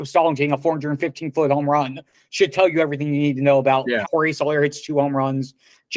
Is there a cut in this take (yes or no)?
yes